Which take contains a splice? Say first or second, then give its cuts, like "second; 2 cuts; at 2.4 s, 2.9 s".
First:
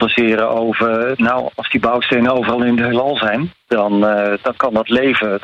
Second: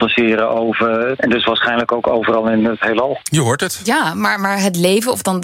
second; 1 cut; at 1.2 s